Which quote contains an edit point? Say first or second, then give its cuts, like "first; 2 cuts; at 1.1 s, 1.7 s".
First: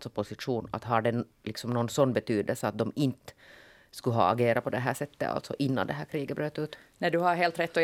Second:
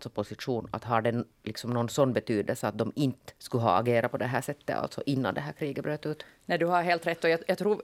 second; 1 cut; at 3.4 s